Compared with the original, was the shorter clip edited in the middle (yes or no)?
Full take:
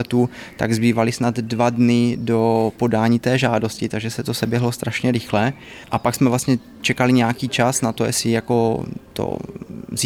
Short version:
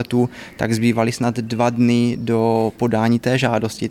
no